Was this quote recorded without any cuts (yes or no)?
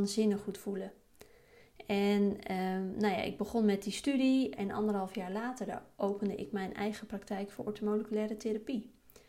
no